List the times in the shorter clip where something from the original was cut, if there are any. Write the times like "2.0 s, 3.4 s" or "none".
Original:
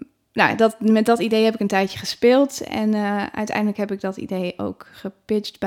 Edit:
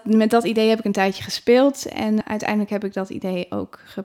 2.2 s